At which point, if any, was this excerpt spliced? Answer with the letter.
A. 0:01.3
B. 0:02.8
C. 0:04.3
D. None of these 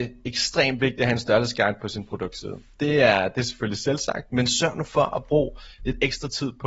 D